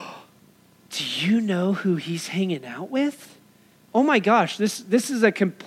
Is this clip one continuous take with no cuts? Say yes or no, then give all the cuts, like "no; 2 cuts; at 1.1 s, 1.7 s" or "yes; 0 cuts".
no; 1 cut; at 3.8 s